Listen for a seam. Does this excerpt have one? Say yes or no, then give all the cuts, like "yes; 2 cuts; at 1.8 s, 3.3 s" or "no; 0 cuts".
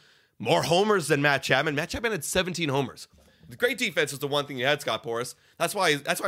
yes; 1 cut; at 3.5 s